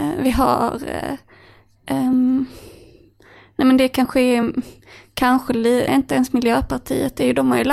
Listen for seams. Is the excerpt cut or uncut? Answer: cut